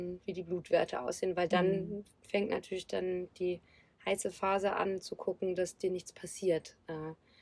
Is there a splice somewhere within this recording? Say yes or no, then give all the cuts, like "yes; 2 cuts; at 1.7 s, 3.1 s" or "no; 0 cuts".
no; 0 cuts